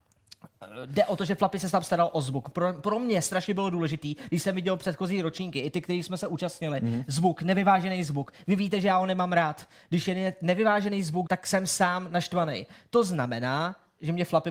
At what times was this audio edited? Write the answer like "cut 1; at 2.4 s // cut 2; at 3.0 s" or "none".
cut 1; at 11.3 s

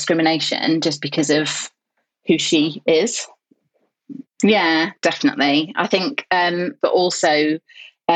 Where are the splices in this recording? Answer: cut 1; at 4.2 s // cut 2; at 6.8 s

